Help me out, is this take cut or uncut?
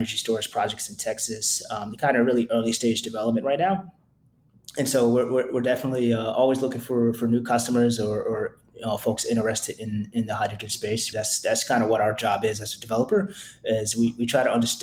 cut